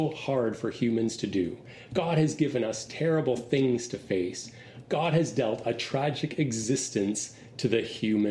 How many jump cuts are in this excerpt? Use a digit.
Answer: 0